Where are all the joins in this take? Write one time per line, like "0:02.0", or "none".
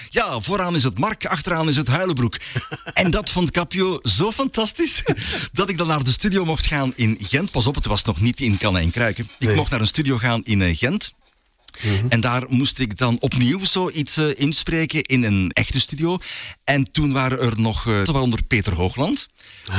0:15.5
0:18.0